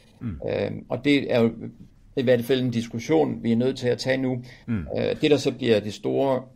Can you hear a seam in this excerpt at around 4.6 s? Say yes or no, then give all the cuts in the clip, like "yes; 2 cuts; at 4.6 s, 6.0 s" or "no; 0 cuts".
yes; 1 cut; at 4.6 s